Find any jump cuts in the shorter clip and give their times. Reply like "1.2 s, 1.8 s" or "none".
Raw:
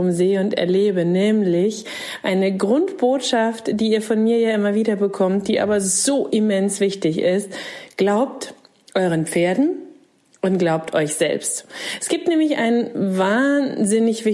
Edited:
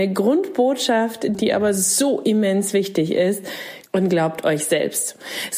1.3 s, 3.9 s